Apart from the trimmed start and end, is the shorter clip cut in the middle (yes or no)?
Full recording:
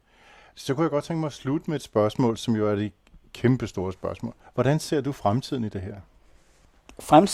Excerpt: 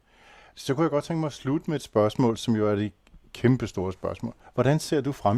no